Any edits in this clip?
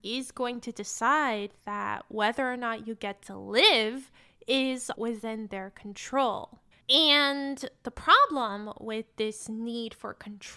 yes; 2 cuts; at 4.9 s, 6.7 s

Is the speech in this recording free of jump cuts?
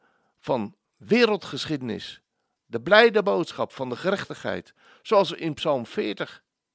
yes; 0 cuts

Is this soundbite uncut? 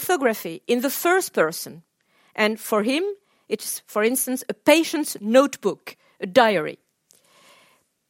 yes; 0 cuts

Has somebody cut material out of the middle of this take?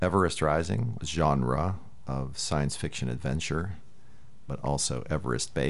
yes; 2 cuts; at 1.0 s, 4.5 s

